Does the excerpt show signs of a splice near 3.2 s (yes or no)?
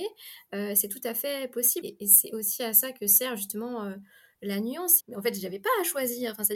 no